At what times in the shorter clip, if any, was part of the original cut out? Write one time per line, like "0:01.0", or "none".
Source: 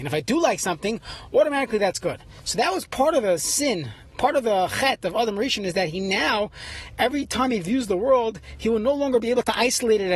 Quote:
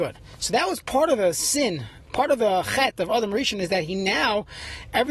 none